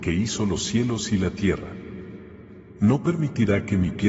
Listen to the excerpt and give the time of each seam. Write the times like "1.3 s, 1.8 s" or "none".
none